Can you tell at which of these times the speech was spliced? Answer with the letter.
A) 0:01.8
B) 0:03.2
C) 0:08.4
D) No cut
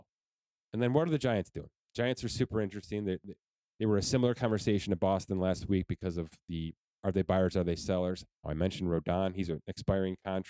C